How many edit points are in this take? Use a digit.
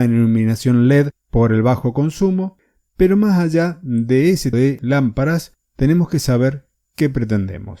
1